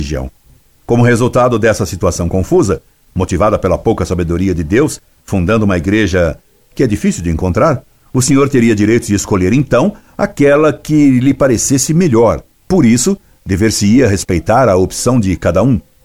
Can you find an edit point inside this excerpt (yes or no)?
no